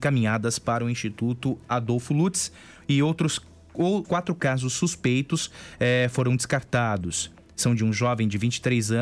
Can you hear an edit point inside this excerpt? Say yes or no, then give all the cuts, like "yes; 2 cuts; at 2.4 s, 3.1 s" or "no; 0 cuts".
yes; 1 cut; at 4.0 s